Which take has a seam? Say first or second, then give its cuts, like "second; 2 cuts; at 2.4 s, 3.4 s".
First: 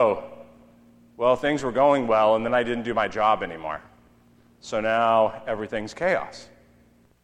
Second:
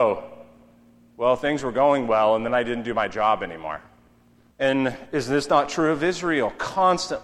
second; 1 cut; at 4.5 s